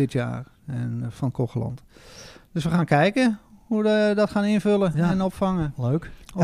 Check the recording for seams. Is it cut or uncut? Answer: uncut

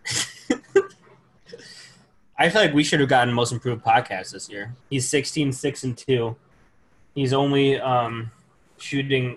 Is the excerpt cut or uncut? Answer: cut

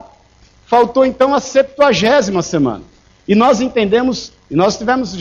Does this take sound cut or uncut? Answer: uncut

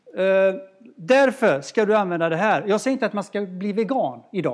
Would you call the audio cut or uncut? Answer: uncut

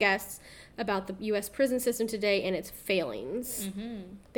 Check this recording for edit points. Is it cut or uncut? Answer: uncut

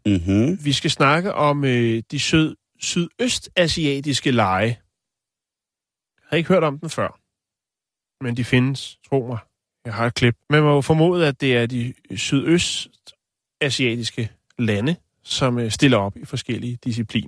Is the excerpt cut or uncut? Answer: cut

